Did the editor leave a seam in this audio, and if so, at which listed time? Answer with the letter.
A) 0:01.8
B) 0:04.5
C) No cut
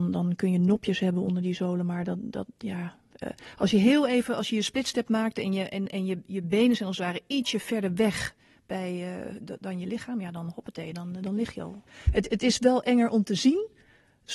C